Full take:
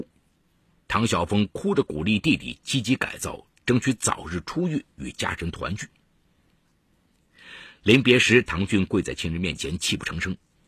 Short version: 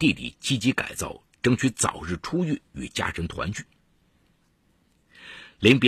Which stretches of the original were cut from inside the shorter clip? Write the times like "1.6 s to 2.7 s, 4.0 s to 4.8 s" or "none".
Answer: none